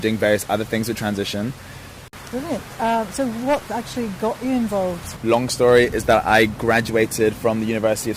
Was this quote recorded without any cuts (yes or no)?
no